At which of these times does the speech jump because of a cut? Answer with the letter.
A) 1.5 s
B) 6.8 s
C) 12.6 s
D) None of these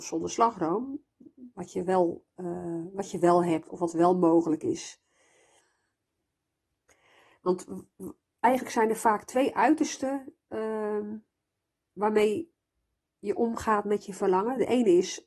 A